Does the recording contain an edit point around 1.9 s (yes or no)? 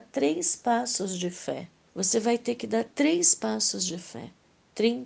yes